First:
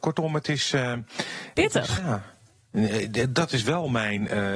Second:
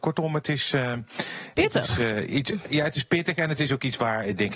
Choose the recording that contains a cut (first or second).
first